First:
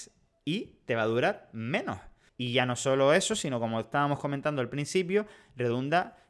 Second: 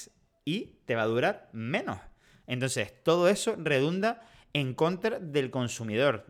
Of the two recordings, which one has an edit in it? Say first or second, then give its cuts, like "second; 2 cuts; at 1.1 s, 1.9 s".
first; 1 cut; at 2.3 s